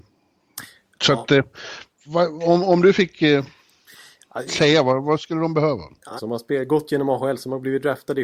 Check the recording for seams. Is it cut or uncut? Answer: cut